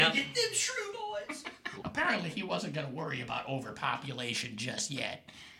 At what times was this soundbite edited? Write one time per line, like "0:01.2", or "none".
0:01.8